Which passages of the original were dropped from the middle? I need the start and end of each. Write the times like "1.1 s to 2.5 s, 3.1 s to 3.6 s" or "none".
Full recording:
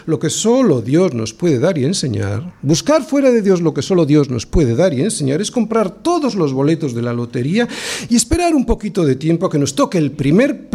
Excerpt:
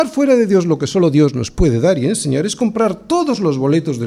none